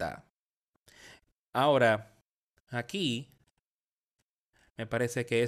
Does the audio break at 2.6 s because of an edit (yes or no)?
no